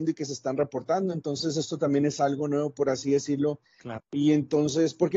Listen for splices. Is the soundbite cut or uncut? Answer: cut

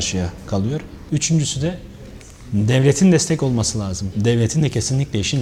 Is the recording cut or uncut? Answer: cut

